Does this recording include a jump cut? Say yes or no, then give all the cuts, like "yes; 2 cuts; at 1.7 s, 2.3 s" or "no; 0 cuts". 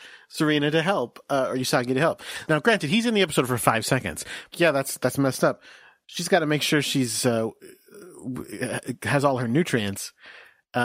yes; 2 cuts; at 2.5 s, 4.5 s